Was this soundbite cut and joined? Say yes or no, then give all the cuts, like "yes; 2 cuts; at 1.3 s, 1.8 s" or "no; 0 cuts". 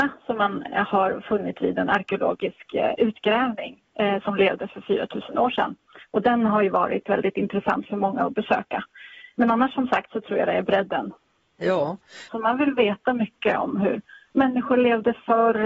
yes; 1 cut; at 12.3 s